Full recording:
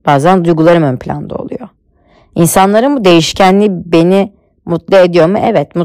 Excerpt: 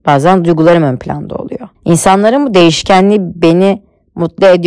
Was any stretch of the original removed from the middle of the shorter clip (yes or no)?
yes